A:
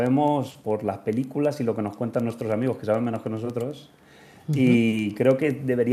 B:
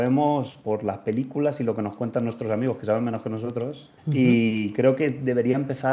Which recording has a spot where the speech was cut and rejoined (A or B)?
B